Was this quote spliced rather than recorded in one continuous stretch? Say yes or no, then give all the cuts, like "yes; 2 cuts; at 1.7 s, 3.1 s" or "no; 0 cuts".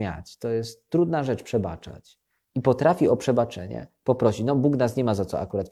yes; 1 cut; at 2.5 s